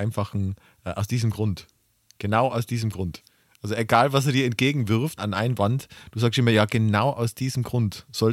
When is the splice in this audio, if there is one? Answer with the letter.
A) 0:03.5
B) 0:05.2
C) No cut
B